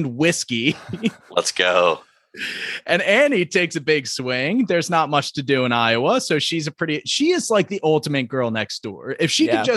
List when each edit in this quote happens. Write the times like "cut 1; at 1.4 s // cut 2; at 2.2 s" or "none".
none